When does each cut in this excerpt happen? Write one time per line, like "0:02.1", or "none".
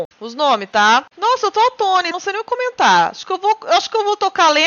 0:02.1